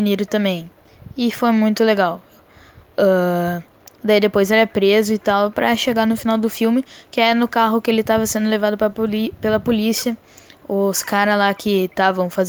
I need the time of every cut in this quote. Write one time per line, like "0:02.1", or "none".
none